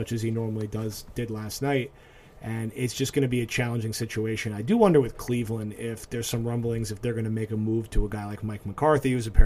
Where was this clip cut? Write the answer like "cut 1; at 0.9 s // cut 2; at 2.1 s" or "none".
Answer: none